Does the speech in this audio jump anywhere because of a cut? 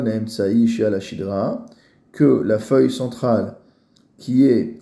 no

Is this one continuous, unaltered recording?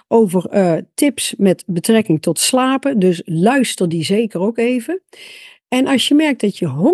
yes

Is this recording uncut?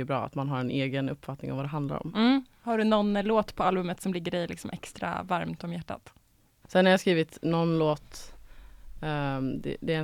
no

